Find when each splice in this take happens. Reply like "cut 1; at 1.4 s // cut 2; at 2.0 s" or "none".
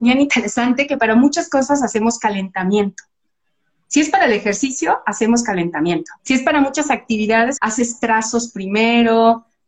cut 1; at 6.2 s // cut 2; at 7.6 s